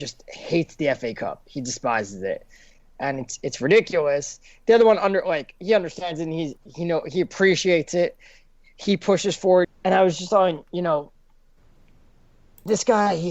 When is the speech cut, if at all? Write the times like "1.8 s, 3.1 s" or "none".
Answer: 9.6 s